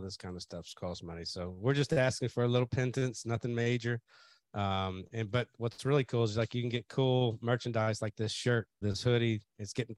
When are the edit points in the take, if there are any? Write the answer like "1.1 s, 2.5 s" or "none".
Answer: 8.8 s